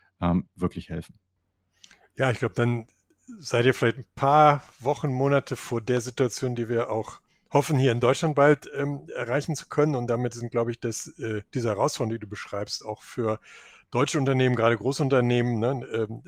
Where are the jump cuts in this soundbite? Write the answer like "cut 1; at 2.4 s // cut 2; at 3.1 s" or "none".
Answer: none

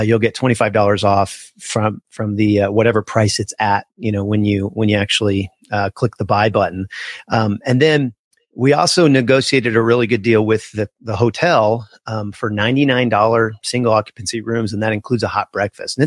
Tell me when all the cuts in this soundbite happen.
none

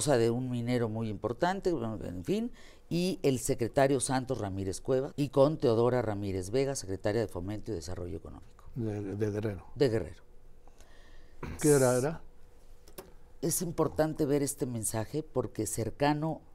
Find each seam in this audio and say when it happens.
cut 1; at 5.1 s // cut 2; at 11.6 s

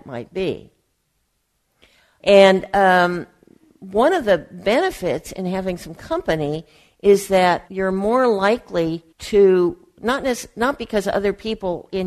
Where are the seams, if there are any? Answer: cut 1; at 2.2 s // cut 2; at 7.7 s // cut 3; at 9.1 s

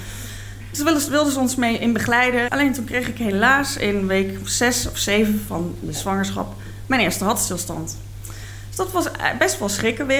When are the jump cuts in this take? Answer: cut 1; at 2.5 s

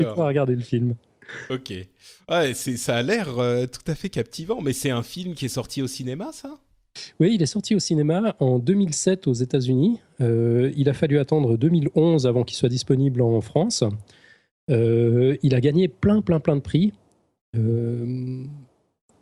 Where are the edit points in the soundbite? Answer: none

